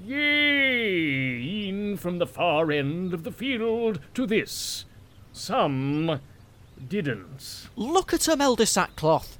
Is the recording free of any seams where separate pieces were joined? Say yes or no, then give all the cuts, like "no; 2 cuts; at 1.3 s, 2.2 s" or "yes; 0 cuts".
no; 1 cut; at 7.7 s